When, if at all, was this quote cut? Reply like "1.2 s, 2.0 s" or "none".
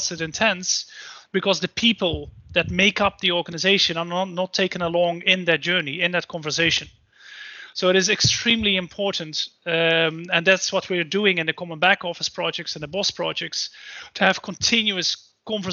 none